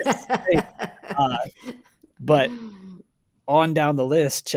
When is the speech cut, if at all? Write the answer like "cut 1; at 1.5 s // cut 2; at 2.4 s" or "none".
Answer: none